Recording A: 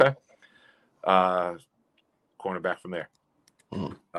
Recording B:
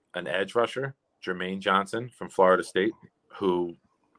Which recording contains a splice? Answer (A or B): A